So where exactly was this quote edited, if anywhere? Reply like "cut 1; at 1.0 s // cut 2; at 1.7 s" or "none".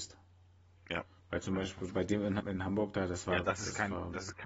cut 1; at 2.4 s